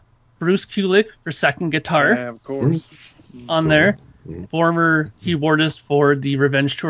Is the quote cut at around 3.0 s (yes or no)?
no